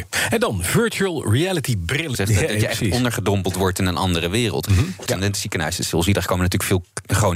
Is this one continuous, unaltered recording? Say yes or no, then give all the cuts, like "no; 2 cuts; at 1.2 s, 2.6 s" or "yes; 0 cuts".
no; 2 cuts; at 2.1 s, 5.1 s